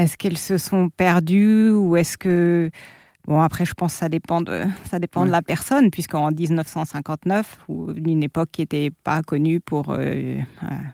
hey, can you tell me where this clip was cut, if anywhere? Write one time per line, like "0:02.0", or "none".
none

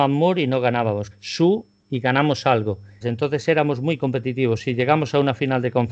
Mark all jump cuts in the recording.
0:01.1
0:03.0

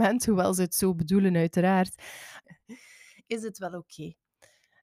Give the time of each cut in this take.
0:02.4

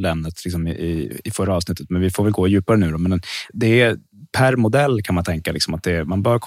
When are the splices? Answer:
0:03.5

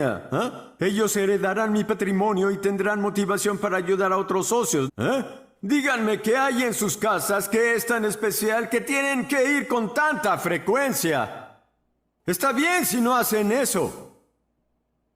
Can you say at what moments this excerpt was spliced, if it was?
0:04.9

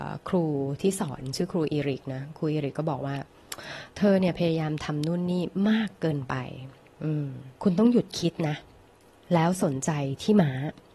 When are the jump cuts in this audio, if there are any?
0:07.6

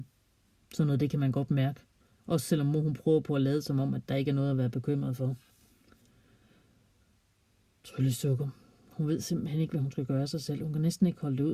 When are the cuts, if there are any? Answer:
none

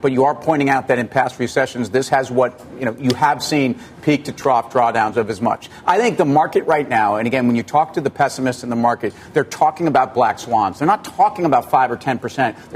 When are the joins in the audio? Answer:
none

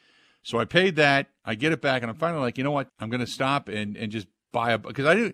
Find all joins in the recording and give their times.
0:02.9

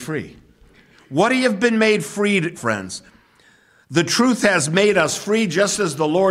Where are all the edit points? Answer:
0:02.6

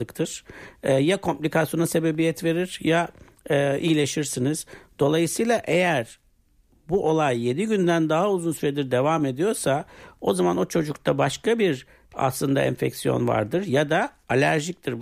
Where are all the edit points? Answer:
none

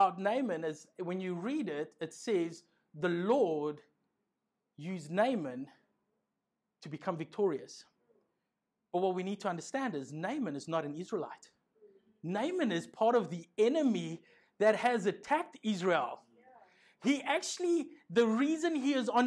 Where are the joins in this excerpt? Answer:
none

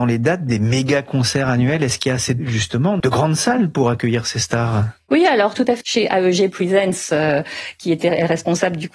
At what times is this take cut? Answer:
0:03.0
0:05.8

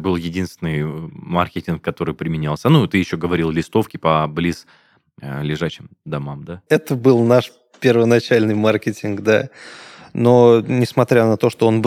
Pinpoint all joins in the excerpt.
none

